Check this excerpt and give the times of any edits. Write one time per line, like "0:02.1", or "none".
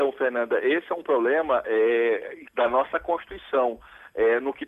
none